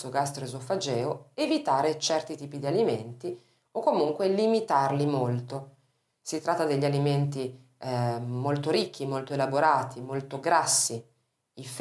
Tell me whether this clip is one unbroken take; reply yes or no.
yes